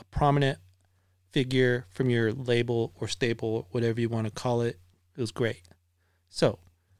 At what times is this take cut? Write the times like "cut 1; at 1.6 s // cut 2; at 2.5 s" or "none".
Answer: cut 1; at 5.1 s